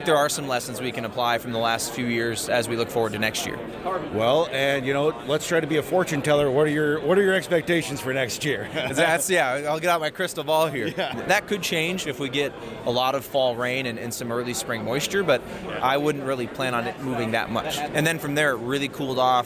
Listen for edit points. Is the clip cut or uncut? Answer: cut